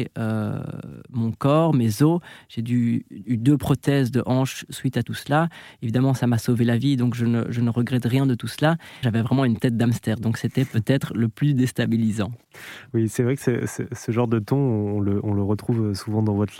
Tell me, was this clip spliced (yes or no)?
yes